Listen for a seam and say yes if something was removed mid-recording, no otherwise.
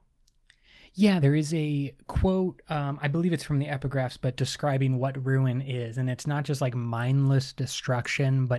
no